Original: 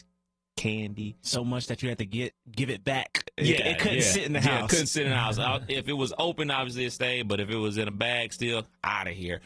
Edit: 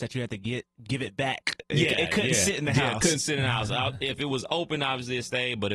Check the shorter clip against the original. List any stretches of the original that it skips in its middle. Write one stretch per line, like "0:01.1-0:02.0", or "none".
none